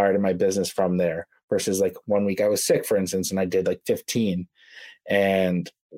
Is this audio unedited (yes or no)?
yes